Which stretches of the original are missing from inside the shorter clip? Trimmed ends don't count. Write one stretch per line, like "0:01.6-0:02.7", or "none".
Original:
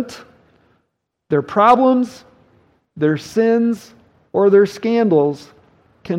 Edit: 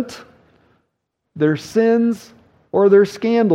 0:01.2-0:02.8